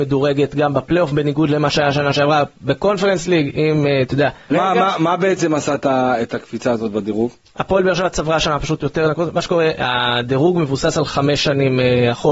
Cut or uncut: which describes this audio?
cut